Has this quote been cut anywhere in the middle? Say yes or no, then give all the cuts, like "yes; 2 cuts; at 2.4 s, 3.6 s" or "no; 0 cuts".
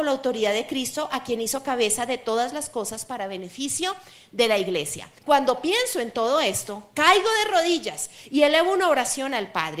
yes; 1 cut; at 5.2 s